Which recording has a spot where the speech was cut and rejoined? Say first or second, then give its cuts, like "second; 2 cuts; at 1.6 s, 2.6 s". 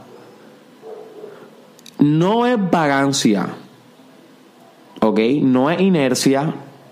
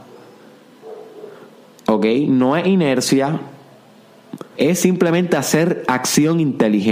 second; 2 cuts; at 1.9 s, 4.5 s